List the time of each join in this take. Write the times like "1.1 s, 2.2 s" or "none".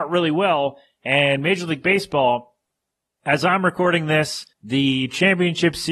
4.5 s